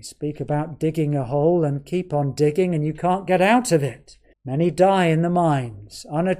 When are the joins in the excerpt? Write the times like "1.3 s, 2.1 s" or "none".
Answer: 4.3 s